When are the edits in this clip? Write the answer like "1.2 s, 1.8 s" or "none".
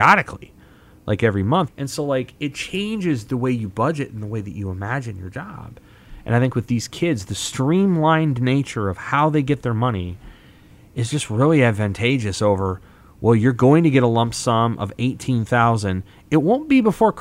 1.7 s